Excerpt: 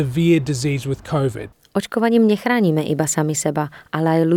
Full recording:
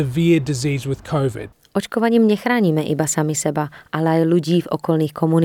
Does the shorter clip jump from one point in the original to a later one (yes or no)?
no